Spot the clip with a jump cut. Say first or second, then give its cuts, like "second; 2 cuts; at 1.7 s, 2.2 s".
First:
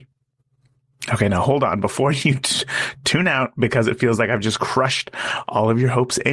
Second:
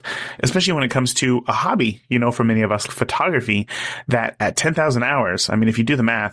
second; 1 cut; at 2.9 s